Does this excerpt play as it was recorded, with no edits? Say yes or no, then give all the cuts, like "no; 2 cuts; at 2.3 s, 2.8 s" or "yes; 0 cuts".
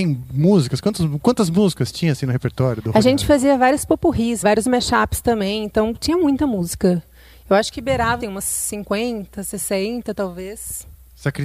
no; 2 cuts; at 4.4 s, 8.2 s